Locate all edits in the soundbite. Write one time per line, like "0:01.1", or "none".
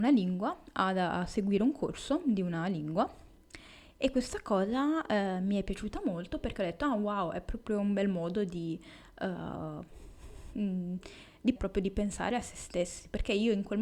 0:11.6